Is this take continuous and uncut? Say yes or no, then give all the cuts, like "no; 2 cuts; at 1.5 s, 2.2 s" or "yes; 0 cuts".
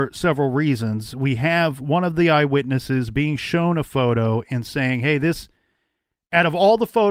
yes; 0 cuts